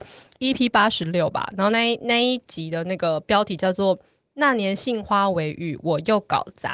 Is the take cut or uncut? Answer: uncut